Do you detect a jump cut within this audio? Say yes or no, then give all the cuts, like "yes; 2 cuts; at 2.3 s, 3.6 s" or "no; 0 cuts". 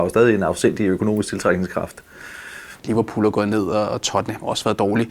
yes; 1 cut; at 2.8 s